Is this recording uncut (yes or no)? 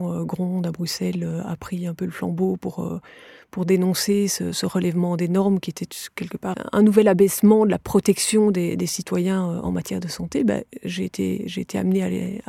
yes